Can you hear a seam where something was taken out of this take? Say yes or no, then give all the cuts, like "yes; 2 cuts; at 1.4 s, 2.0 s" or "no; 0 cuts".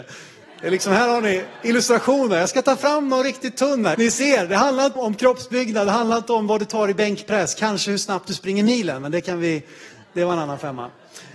yes; 2 cuts; at 3.9 s, 5.0 s